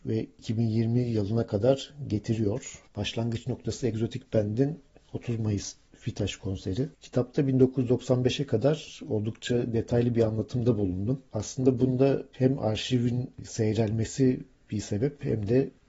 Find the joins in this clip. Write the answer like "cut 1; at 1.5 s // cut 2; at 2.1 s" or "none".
cut 1; at 6.9 s // cut 2; at 11.3 s